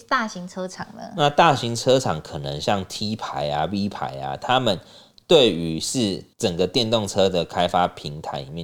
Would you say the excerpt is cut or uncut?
cut